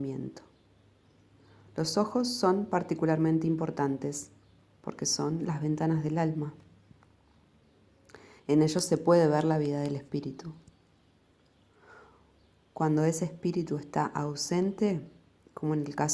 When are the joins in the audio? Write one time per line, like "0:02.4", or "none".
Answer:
none

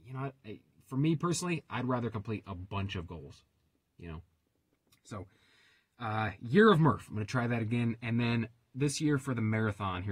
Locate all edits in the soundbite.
none

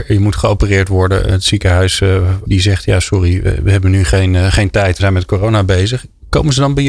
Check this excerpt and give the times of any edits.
0:02.4
0:05.0

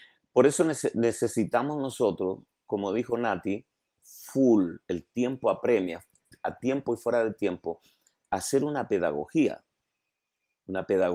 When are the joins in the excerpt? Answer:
none

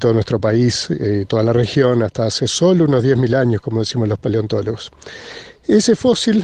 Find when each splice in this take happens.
none

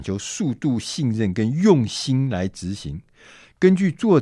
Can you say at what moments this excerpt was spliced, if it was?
none

